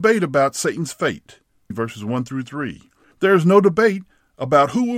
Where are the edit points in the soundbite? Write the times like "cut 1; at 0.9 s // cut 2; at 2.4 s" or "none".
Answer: cut 1; at 1.7 s